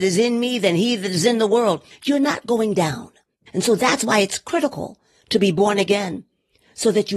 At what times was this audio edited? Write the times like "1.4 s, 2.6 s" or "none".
3.4 s